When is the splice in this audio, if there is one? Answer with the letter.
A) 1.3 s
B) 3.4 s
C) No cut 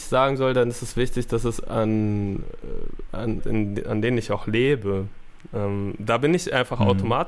B